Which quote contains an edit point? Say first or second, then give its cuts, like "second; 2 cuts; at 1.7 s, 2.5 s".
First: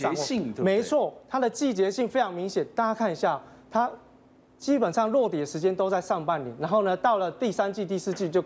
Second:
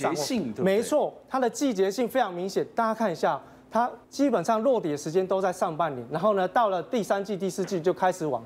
second; 1 cut; at 4.0 s